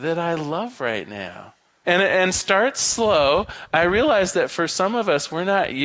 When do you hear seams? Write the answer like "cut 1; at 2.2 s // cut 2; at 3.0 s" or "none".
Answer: cut 1; at 1.8 s